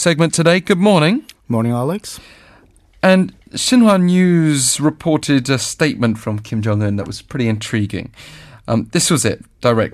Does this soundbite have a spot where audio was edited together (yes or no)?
no